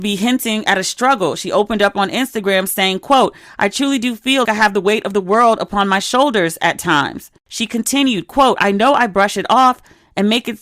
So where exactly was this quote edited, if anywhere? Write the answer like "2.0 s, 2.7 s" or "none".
4.4 s